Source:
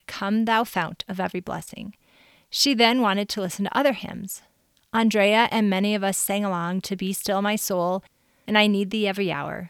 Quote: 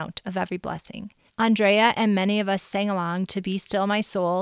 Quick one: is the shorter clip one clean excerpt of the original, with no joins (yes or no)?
no